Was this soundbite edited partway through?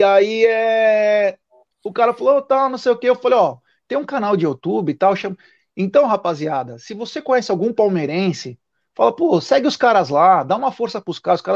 no; 0 cuts

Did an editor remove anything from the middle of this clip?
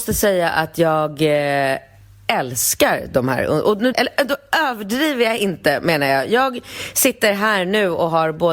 yes; 1 cut; at 3.9 s

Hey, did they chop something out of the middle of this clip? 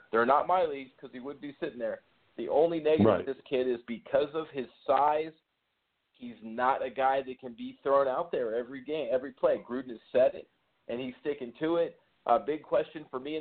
no; 0 cuts

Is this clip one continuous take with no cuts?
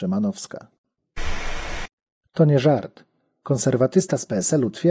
yes; 0 cuts

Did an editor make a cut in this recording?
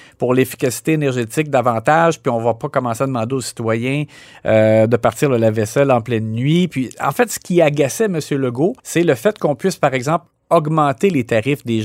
yes; 1 cut; at 8.8 s

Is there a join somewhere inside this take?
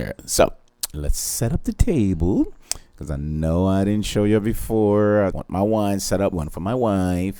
yes; 2 cuts; at 5.3 s, 6.3 s

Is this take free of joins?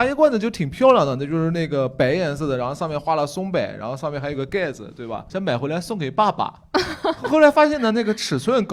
yes; 0 cuts

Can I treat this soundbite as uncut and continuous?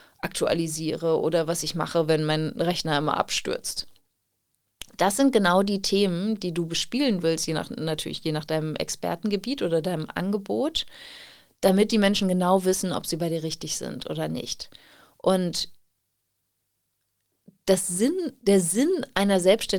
yes; 0 cuts

